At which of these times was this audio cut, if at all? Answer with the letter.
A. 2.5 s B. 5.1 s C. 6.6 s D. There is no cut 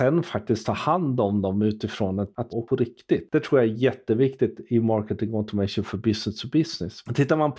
A